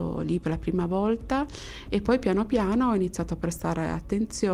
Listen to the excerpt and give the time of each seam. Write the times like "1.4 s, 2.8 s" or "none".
none